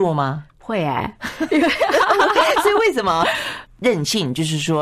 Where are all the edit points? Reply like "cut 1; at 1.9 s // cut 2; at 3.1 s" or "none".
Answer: cut 1; at 3.7 s